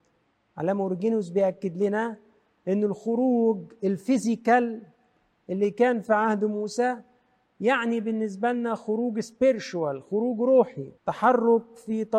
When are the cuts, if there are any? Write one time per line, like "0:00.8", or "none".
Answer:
0:11.0